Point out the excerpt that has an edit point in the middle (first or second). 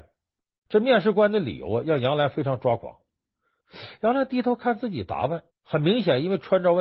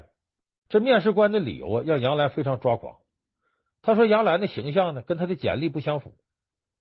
first